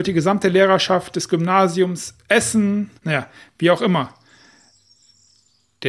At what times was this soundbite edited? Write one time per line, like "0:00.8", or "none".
0:03.0